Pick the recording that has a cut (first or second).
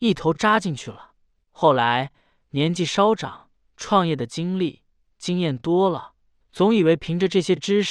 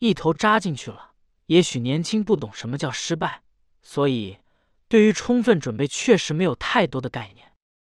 first